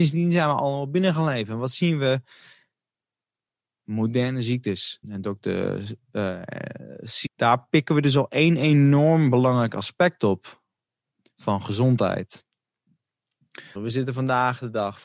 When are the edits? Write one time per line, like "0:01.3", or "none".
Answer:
0:05.0
0:07.3
0:13.8